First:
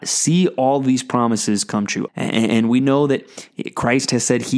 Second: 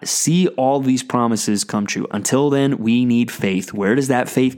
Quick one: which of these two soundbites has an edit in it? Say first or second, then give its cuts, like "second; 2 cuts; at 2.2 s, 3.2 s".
first; 1 cut; at 2.1 s